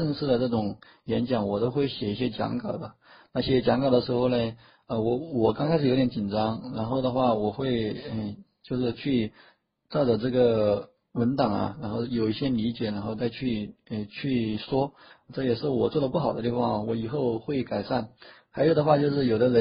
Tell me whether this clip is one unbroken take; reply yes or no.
no